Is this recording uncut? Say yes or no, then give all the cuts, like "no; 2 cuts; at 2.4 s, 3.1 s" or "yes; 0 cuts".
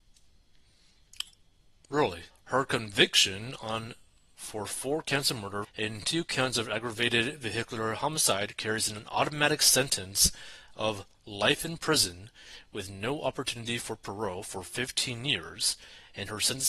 no; 2 cuts; at 2.3 s, 5.6 s